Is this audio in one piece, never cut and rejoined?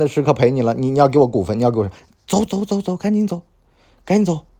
no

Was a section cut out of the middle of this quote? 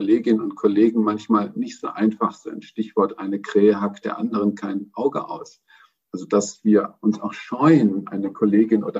no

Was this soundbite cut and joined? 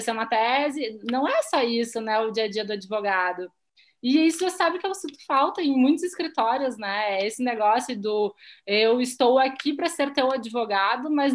no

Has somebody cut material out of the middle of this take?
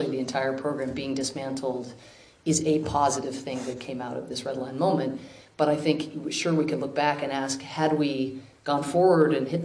no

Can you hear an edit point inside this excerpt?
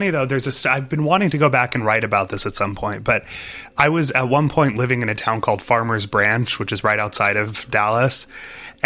no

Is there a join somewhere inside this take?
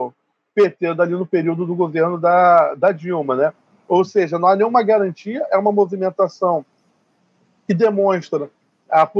no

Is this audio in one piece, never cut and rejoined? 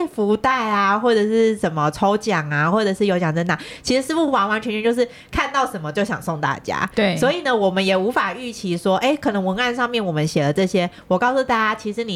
yes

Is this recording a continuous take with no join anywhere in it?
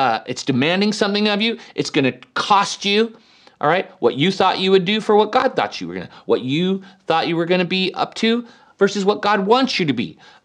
yes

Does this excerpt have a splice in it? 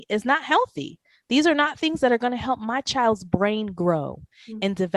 no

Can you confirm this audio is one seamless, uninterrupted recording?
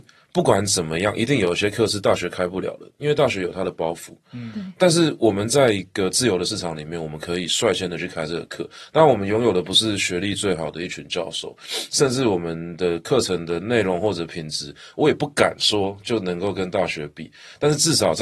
yes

